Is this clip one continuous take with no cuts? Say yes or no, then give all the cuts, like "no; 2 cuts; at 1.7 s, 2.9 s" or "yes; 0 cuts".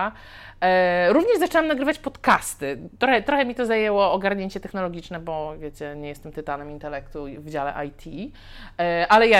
yes; 0 cuts